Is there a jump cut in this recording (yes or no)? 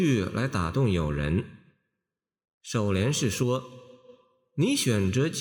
no